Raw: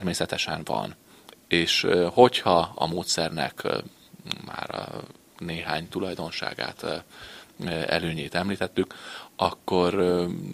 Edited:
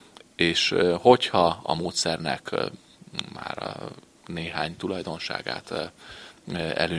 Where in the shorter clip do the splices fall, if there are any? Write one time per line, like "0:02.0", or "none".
none